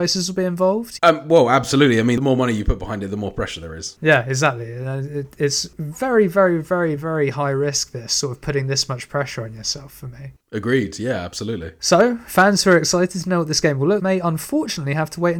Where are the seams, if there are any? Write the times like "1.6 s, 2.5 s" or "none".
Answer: 1.0 s, 7.0 s, 14.0 s